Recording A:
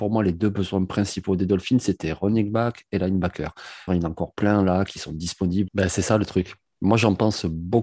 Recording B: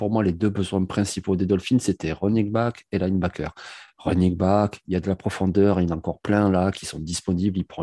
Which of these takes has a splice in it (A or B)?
A